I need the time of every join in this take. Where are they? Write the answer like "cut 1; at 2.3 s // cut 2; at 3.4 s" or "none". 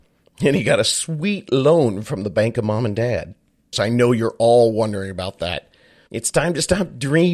cut 1; at 3.7 s // cut 2; at 6.1 s